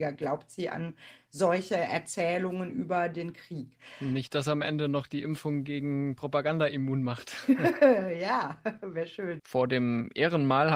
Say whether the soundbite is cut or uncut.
cut